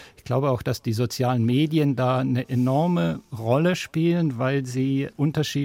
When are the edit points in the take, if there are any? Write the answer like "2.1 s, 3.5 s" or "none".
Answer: none